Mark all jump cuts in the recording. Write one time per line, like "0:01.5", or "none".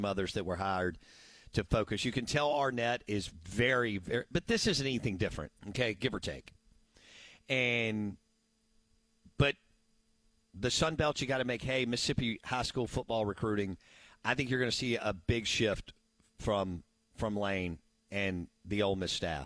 0:05.6